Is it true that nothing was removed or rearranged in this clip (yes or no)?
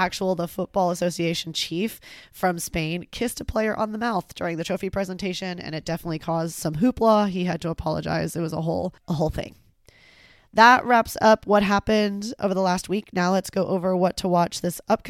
no